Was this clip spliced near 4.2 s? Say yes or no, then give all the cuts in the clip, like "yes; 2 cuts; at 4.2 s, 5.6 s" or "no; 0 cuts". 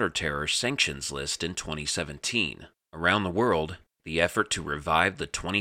no; 1 cut; at 2.9 s